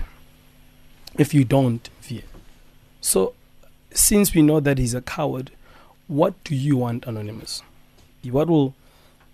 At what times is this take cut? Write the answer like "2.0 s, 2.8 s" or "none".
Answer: 2.0 s, 8.2 s